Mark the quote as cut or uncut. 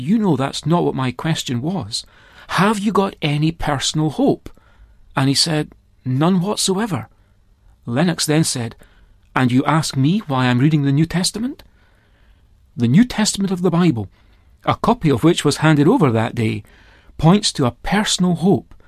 uncut